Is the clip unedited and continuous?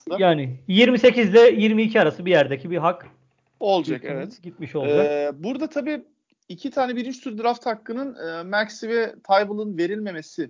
yes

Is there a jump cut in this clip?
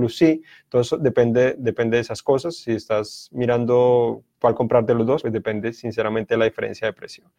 yes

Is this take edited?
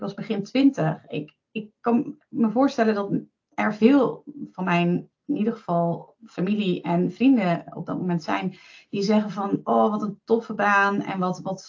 no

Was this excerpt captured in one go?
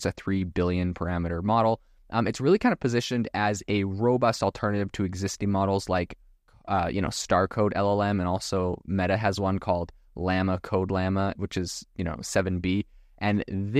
yes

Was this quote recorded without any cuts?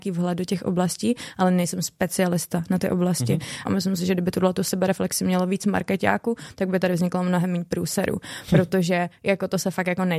no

